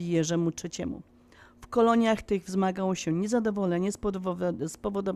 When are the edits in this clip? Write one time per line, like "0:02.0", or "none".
none